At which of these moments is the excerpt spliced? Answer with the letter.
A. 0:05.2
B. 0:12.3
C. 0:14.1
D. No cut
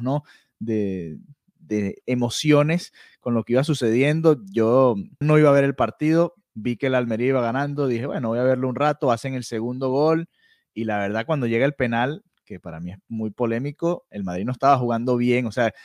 A